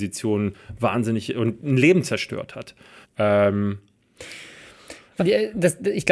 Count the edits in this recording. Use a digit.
2